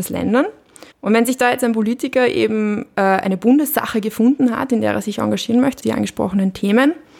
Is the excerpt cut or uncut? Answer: cut